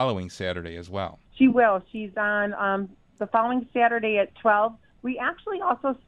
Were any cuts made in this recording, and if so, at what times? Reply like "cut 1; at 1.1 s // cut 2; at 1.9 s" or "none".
cut 1; at 1.2 s